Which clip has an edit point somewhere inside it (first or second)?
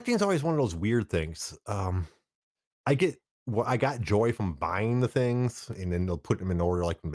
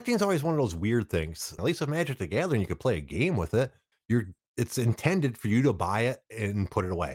second